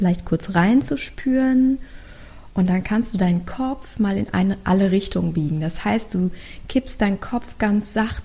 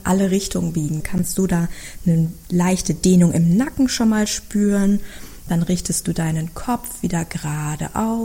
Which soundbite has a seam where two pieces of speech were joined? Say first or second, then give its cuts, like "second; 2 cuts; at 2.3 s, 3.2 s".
second; 1 cut; at 1.0 s